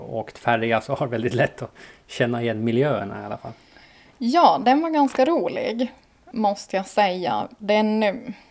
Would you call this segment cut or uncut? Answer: cut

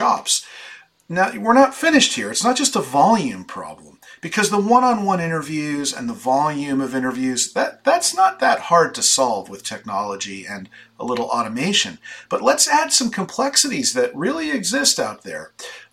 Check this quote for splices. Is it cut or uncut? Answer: uncut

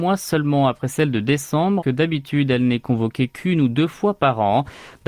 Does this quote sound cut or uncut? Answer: cut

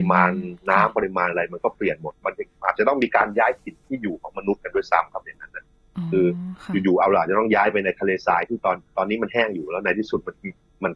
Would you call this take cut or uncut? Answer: uncut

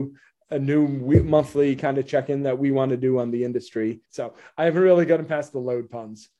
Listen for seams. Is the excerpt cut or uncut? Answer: cut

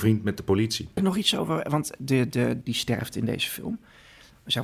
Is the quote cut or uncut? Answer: cut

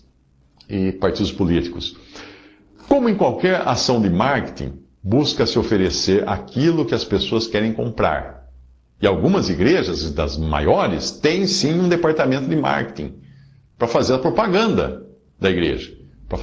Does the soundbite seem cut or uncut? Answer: uncut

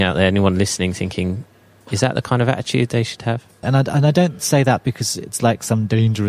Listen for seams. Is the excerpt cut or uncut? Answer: cut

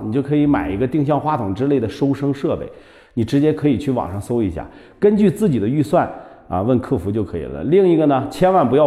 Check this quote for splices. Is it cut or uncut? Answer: uncut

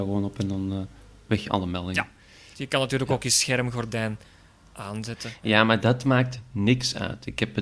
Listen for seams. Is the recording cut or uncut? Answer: cut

